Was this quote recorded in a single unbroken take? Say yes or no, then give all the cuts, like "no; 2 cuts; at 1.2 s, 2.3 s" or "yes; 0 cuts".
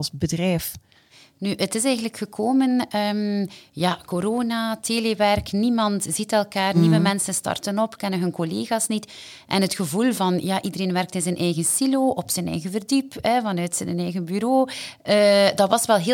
yes; 0 cuts